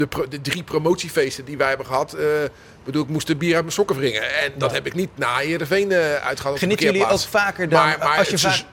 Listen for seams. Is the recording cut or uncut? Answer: uncut